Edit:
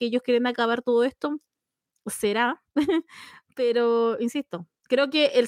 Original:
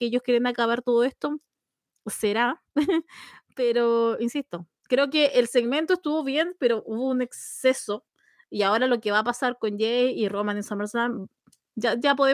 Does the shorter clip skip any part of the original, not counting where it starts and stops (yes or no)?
no